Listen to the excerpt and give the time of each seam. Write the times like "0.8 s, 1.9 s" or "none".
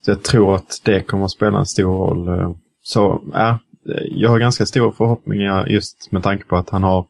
2.7 s